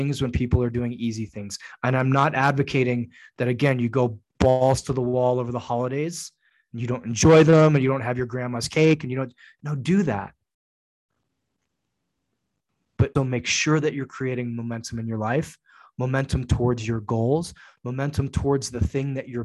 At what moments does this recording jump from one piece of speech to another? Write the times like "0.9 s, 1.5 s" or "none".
13.2 s